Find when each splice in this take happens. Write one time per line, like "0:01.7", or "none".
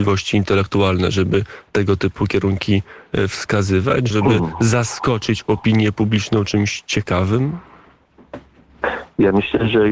0:04.1